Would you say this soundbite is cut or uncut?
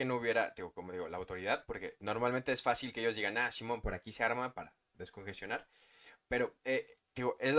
uncut